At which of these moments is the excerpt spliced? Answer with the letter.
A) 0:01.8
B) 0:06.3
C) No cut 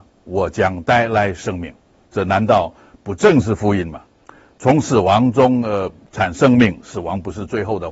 B